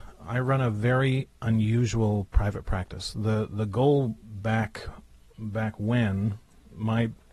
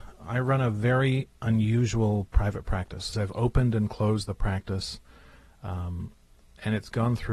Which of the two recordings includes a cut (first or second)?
second